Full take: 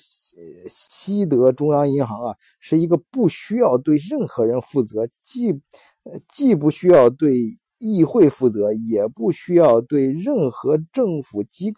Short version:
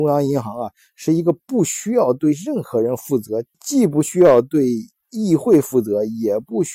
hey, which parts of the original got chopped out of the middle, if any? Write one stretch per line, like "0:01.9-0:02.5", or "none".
0:05.2-0:06.2